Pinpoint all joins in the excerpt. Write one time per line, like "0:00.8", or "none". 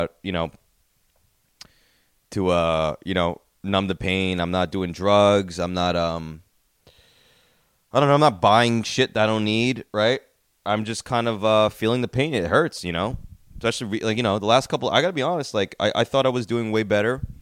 none